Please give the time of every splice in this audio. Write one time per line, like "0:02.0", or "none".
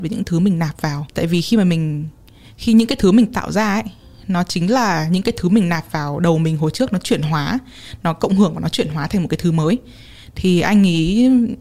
0:01.1